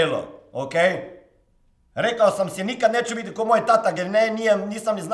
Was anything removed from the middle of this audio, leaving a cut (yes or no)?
no